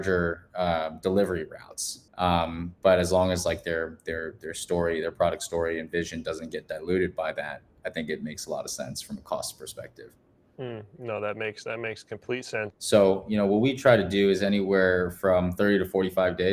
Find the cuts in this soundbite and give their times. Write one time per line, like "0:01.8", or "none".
0:02.1
0:12.7